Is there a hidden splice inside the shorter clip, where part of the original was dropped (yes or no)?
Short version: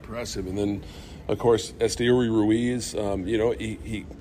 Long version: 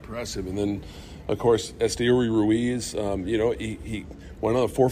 no